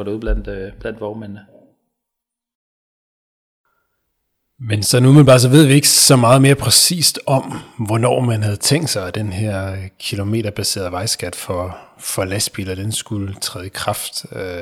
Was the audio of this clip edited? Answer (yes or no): no